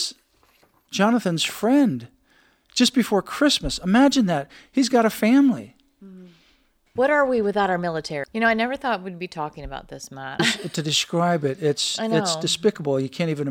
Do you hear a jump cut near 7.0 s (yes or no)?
yes